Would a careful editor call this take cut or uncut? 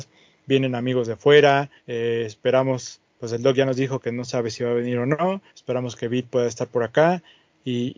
cut